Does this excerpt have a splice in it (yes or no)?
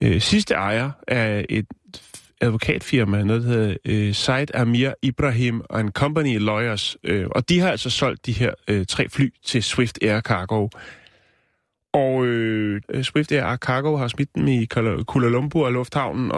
yes